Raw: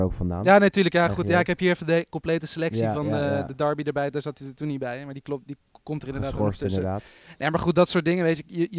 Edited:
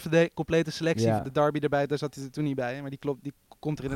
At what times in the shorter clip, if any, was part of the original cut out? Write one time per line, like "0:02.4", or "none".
0:01.2